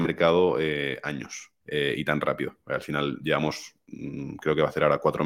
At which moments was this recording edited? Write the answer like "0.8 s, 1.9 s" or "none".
1.6 s